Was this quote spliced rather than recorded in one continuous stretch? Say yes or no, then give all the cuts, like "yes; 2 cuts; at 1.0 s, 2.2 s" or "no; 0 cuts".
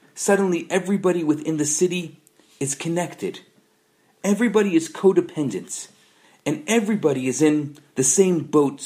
no; 0 cuts